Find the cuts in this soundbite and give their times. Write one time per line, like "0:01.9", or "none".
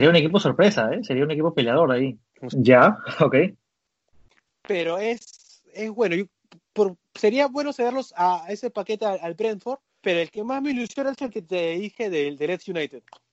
0:02.5